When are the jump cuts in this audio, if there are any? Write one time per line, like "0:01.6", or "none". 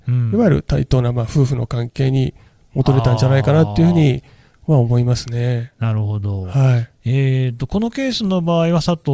none